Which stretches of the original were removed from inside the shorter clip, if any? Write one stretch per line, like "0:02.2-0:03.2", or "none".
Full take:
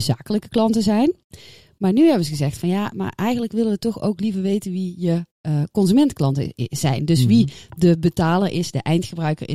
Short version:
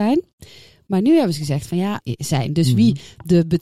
0:02.9-0:06.5